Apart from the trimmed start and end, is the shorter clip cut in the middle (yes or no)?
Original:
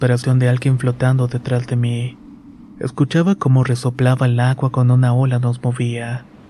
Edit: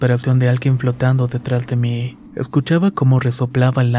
yes